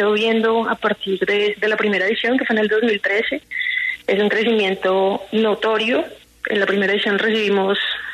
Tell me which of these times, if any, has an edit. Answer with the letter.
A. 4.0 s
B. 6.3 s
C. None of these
C